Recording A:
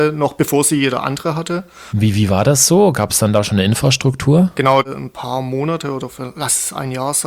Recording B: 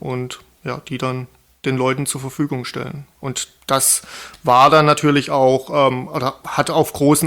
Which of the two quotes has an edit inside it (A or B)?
A